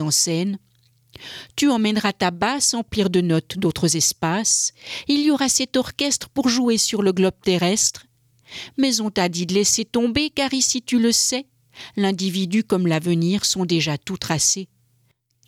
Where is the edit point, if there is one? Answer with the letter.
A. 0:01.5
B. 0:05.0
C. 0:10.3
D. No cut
D